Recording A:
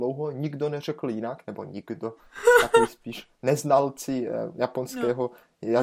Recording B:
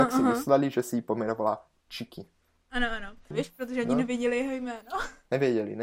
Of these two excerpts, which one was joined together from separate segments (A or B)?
B